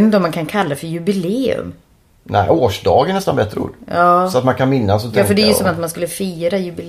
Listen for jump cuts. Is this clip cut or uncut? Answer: uncut